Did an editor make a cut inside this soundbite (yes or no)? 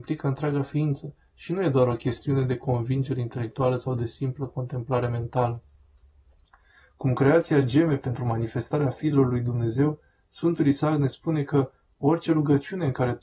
no